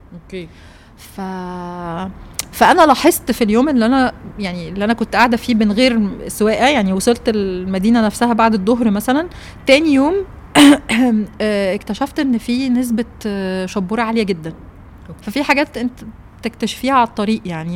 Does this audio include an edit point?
yes; 1 cut; at 15.2 s

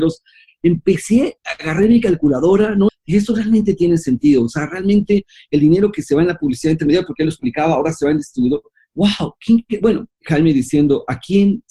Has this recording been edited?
yes; 2 cuts; at 2.9 s, 10.2 s

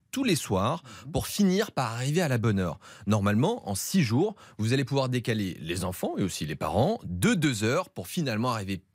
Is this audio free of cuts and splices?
yes; 0 cuts

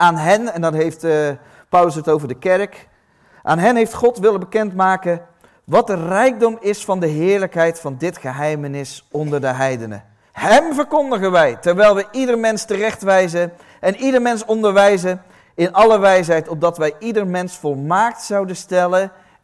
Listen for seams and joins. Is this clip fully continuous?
no; 1 cut; at 10.3 s

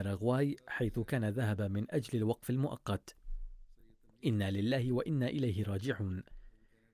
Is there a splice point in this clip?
no; 0 cuts

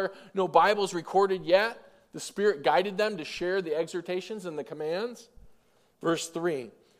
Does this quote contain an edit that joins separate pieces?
no; 0 cuts

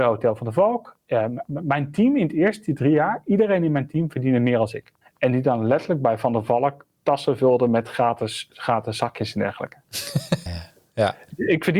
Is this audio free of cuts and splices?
no; 2 cuts; at 5.0 s, 10.5 s

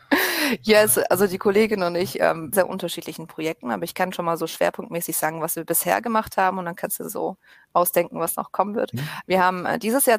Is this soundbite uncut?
no; 1 cut; at 2.5 s

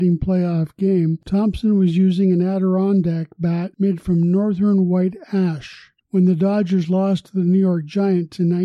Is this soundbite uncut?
no; 1 cut; at 6.0 s

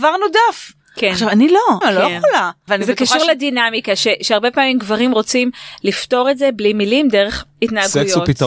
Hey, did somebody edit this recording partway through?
yes; 1 cut; at 1.8 s

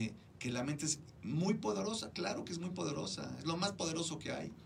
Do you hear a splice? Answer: no; 0 cuts

